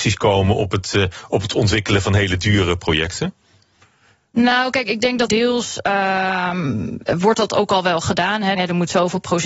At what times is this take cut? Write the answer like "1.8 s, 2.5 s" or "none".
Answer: 5.3 s, 8.5 s